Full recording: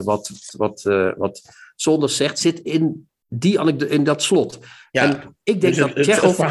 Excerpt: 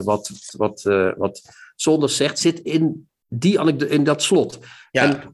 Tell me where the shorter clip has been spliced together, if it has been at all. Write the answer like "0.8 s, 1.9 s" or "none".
none